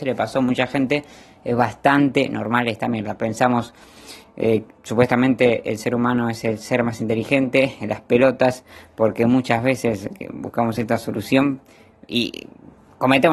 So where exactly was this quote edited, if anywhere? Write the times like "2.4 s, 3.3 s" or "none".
none